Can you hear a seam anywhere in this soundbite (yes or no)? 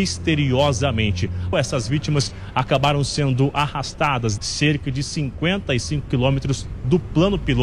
yes